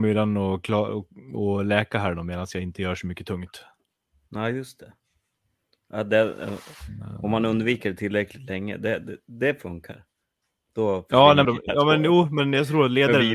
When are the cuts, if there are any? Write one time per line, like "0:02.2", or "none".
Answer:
0:11.4